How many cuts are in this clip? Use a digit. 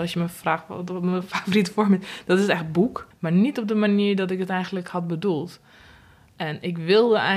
1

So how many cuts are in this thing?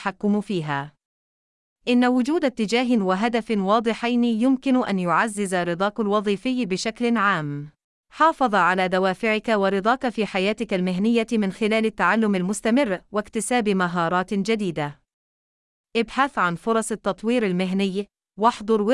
1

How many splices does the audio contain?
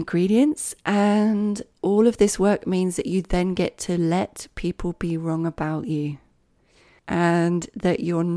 0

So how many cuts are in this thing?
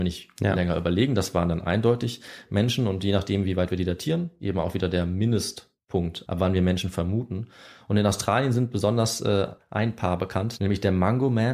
0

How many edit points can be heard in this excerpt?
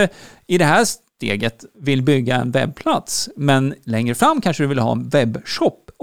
0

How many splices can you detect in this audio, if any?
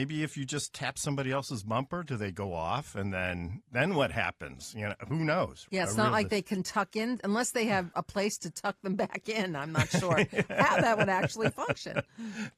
0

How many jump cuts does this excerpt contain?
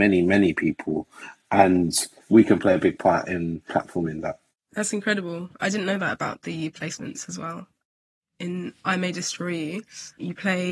0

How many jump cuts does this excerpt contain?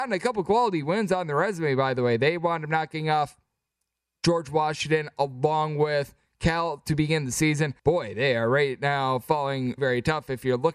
2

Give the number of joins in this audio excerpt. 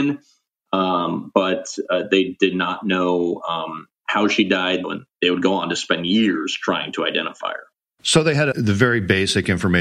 2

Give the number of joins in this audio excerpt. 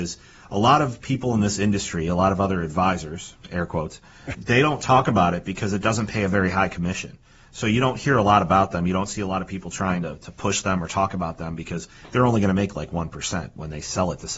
1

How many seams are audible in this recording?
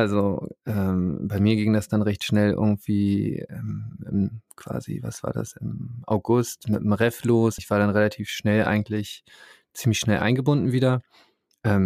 1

